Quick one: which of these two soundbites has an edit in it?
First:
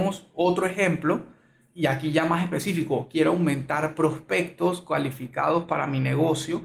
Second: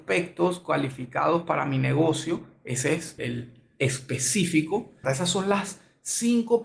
second; 2 cuts; at 3.2 s, 5.0 s

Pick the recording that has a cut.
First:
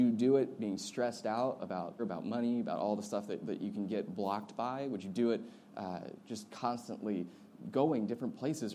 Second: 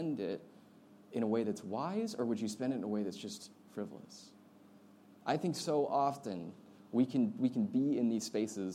first; 1 cut; at 2.0 s

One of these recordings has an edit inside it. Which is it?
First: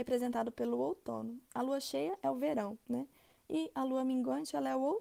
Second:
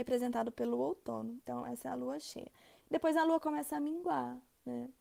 second; 1 cut; at 1.4 s

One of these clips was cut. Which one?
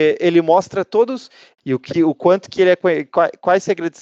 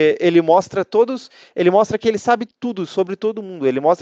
first; 1 cut; at 1.5 s

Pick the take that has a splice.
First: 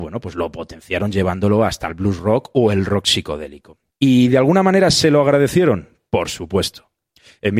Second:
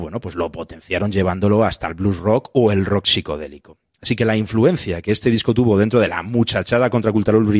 first; 1 cut; at 3.9 s

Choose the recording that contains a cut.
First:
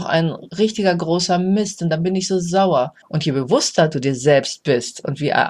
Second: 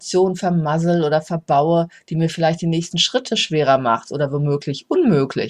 first; 1 cut; at 3.0 s

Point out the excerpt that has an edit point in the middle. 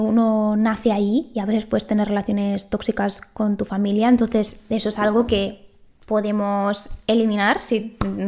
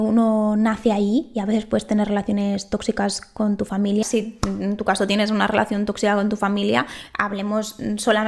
second; 1 cut; at 4.0 s

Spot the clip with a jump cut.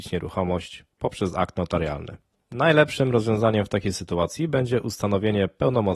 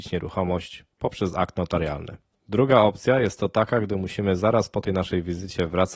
first; 1 cut; at 2.4 s

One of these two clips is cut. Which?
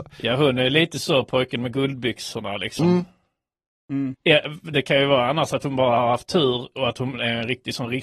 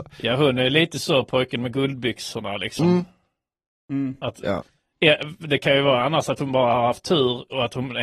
first; 1 cut; at 4.1 s

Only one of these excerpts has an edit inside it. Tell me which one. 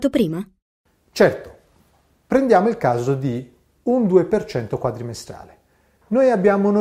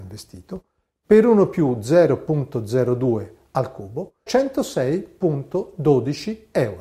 second; 1 cut; at 4.3 s

